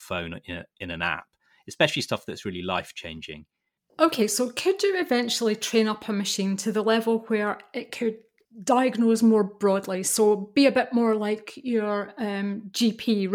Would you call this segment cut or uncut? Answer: uncut